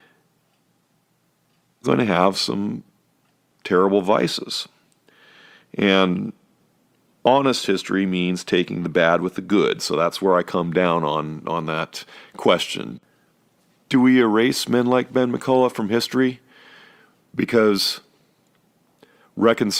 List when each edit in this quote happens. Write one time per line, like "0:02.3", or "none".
0:01.8